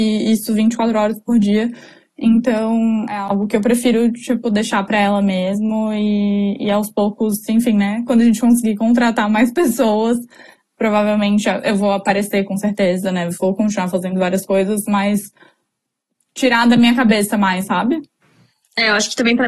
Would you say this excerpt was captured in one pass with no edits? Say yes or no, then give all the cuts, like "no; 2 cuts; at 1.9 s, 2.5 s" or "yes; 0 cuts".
yes; 0 cuts